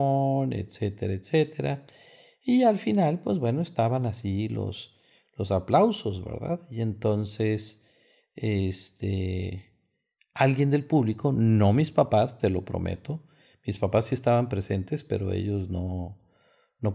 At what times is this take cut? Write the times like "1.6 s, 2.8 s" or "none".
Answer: none